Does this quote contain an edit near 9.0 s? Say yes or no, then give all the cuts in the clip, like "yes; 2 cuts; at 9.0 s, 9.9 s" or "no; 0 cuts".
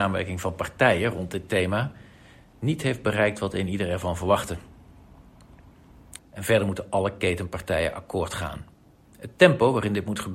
yes; 2 cuts; at 6.2 s, 9.0 s